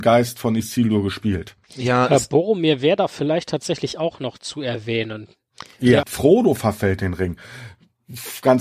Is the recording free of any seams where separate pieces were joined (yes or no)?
no